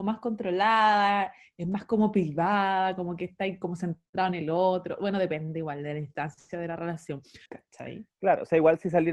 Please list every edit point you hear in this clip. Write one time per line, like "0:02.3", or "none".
0:07.5